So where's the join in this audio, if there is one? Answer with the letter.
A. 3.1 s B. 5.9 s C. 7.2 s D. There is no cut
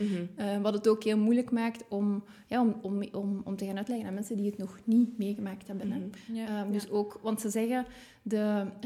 D